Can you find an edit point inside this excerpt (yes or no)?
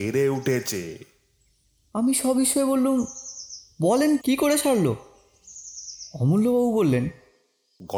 yes